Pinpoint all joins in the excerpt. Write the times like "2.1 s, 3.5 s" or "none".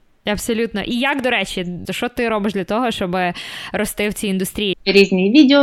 1.8 s, 4.7 s